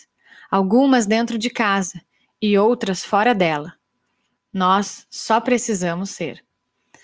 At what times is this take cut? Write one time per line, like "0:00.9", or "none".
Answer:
0:04.4